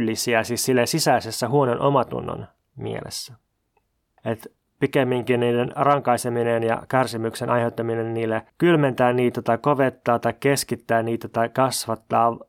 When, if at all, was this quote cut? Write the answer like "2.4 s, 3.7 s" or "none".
4.2 s, 8.5 s